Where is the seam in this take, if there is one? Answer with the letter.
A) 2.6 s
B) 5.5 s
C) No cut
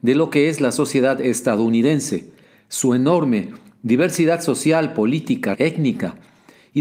B